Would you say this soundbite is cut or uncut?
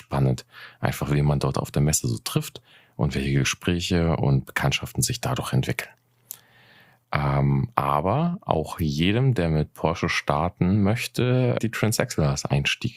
cut